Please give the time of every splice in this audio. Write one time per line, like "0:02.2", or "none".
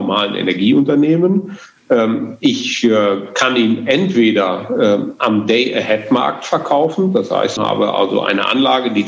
0:07.6